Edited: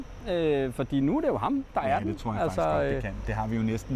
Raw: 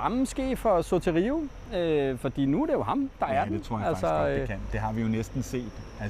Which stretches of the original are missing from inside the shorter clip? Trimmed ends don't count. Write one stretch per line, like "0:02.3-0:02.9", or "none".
none